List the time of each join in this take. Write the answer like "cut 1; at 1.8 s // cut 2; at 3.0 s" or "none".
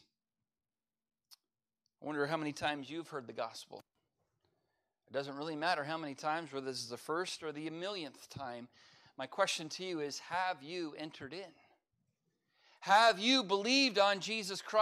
none